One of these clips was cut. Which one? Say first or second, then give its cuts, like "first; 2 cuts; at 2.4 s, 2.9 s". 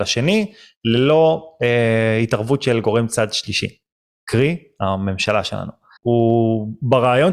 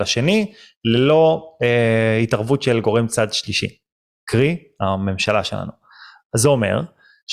first; 1 cut; at 6.0 s